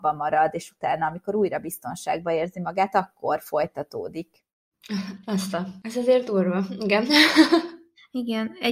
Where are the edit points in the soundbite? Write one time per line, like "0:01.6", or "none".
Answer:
none

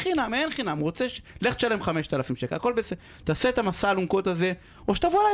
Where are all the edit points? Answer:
none

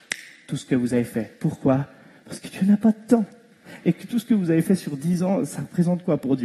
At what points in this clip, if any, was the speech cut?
none

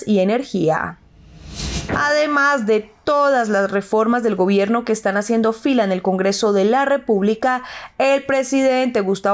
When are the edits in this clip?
0:01.9

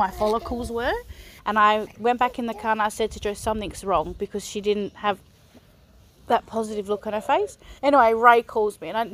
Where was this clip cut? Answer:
0:01.4
0:07.8

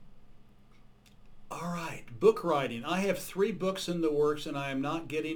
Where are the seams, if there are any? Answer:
none

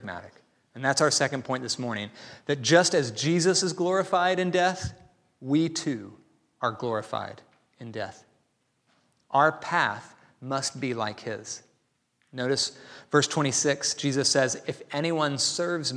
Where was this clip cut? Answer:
none

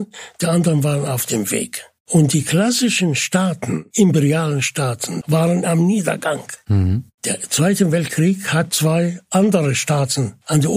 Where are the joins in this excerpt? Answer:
0:05.2

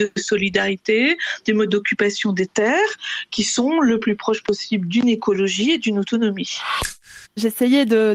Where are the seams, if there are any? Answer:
0:07.2

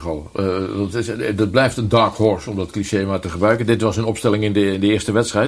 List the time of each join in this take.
none

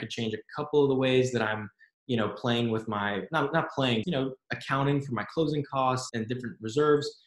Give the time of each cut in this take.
0:04.0
0:06.1

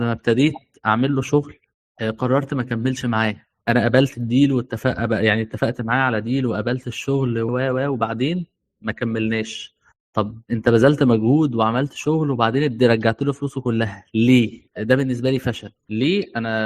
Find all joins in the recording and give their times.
0:07.5
0:14.7

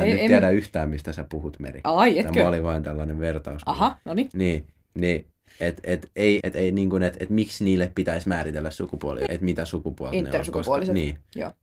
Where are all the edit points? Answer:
0:06.4
0:09.3

